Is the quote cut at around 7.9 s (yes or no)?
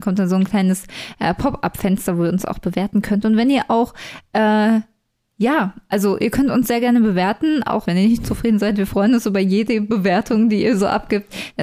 yes